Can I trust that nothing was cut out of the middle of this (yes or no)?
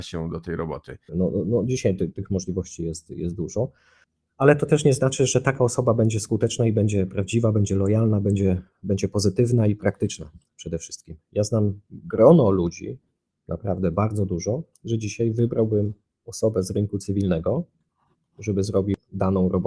no